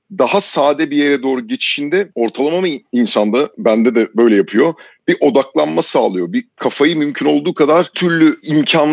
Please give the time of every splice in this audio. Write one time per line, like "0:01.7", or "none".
0:07.9